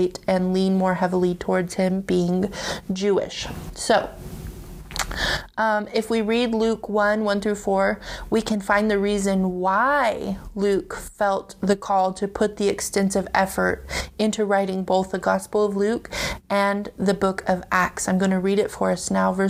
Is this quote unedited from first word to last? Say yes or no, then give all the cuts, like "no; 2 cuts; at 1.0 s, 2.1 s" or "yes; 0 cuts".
yes; 0 cuts